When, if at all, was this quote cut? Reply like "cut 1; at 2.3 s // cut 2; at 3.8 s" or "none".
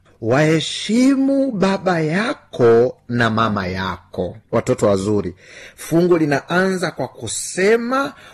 cut 1; at 4.5 s